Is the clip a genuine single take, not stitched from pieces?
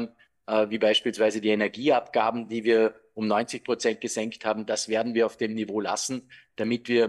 yes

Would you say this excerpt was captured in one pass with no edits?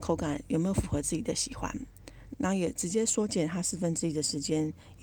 no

